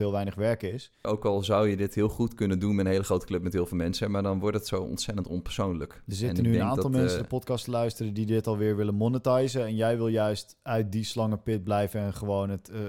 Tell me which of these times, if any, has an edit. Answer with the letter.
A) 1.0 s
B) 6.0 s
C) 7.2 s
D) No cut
A